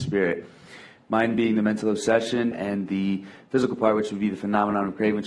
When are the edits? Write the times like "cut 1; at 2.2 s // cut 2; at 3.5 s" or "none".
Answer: cut 1; at 2.5 s

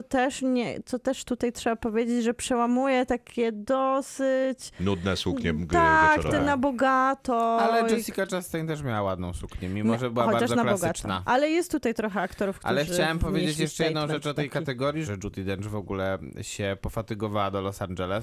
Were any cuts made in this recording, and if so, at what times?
cut 1; at 15.1 s

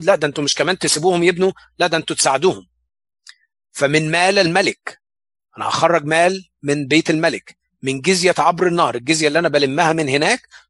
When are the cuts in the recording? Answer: none

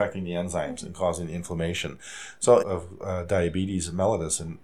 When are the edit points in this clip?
cut 1; at 2.6 s

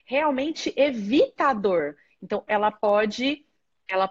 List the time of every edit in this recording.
cut 1; at 2.5 s

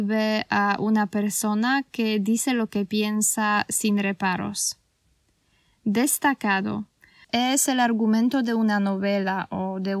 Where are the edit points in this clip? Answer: cut 1; at 7.2 s

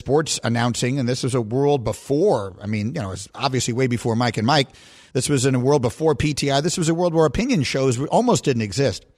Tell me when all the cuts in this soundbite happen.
none

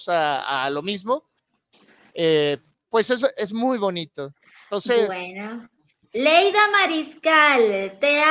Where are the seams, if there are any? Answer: cut 1; at 5.7 s

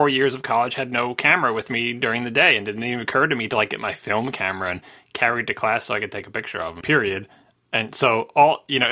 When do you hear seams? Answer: cut 1; at 6.8 s

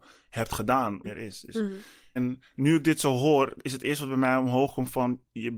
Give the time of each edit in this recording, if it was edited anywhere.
cut 1; at 1.0 s // cut 2; at 2.2 s

